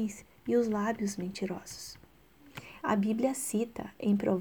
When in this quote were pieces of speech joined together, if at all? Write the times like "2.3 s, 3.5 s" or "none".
2.8 s